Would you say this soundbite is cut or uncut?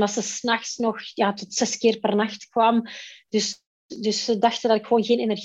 uncut